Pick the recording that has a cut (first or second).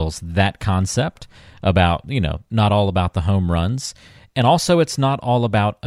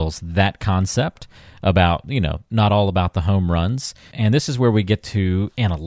second